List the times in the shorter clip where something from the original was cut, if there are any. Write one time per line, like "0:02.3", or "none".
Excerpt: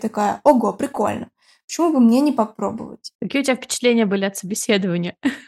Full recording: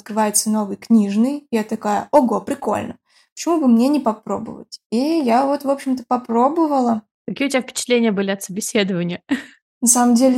0:03.1